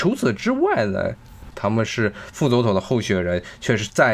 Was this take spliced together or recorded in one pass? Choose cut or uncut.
cut